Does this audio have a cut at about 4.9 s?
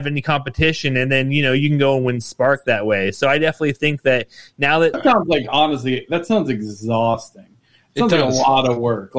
yes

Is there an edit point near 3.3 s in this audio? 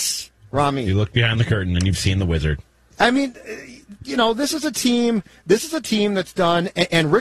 no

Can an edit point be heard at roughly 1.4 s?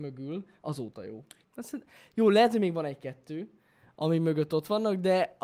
yes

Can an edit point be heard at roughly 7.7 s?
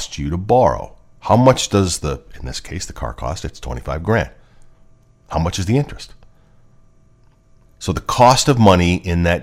yes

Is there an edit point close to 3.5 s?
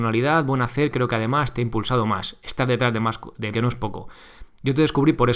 yes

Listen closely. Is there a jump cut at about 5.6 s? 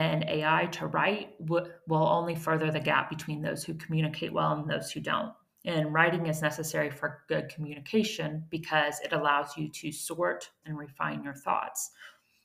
no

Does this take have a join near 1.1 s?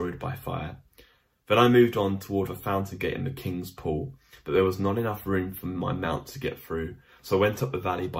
no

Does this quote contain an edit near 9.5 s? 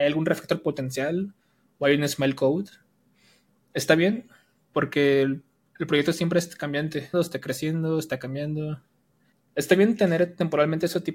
no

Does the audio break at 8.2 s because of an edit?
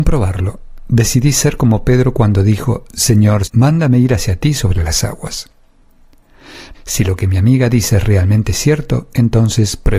no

